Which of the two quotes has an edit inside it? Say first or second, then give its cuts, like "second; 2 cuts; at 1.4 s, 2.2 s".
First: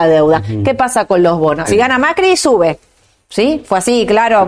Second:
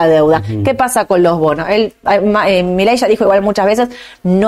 first; 1 cut; at 1.7 s